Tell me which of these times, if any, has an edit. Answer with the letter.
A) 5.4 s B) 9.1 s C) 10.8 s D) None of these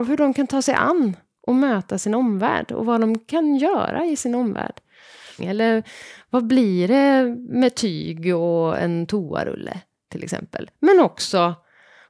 A